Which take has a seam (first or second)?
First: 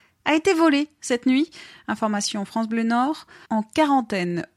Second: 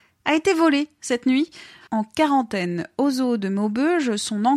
second